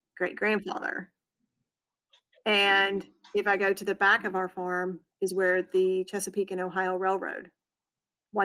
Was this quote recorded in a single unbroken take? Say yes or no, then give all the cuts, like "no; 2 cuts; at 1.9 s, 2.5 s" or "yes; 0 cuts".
yes; 0 cuts